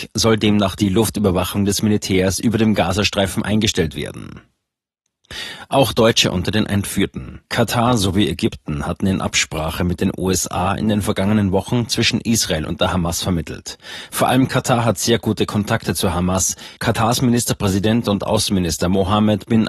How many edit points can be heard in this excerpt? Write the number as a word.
two